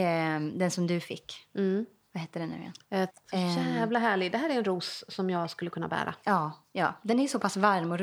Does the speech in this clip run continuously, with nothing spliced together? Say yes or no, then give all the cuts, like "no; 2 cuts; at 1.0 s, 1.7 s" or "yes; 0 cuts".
no; 1 cut; at 3.1 s